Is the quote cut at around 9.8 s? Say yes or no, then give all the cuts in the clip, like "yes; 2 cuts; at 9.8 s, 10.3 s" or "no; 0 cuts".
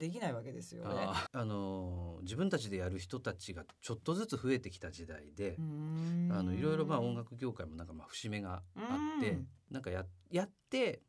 no; 1 cut; at 1.3 s